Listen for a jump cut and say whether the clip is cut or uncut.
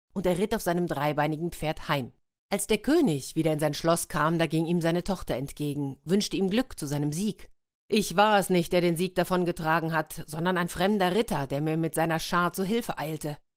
uncut